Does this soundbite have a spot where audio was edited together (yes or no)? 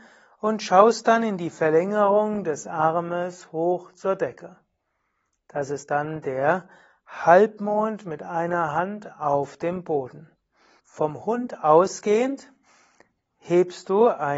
yes